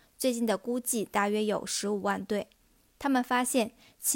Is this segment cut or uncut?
uncut